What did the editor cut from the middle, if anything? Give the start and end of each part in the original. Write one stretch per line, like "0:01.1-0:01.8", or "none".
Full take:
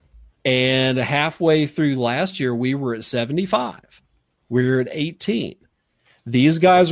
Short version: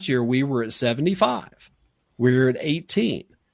none